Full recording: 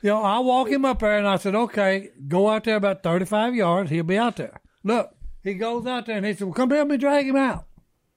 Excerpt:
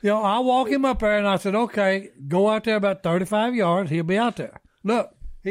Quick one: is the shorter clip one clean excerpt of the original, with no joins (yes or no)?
yes